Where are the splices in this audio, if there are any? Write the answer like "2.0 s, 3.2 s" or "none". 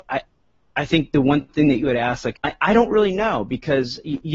2.3 s